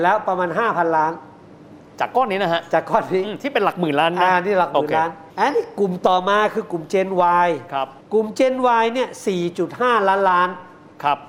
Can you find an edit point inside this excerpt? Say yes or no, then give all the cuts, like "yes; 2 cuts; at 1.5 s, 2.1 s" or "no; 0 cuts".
yes; 2 cuts; at 5.3 s, 8.0 s